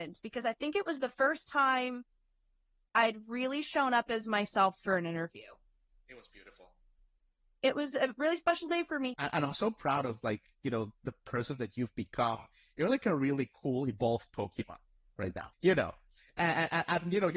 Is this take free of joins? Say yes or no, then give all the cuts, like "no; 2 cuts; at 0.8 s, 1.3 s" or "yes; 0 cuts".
no; 2 cuts; at 9.1 s, 15.5 s